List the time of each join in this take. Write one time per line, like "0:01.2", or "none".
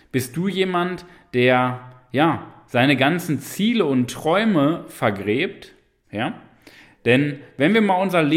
0:06.0